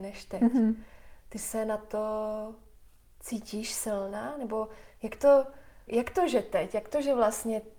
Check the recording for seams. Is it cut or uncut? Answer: cut